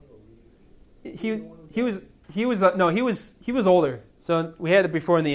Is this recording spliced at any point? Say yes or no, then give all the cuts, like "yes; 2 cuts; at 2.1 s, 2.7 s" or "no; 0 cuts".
yes; 1 cut; at 4.1 s